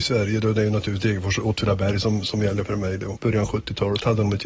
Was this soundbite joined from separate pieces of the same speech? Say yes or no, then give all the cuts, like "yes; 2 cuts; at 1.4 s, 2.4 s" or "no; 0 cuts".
yes; 1 cut; at 3.1 s